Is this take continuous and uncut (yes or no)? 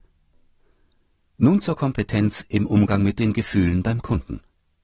yes